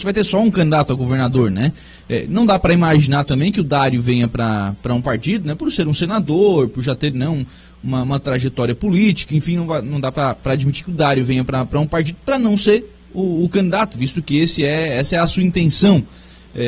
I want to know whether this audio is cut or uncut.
uncut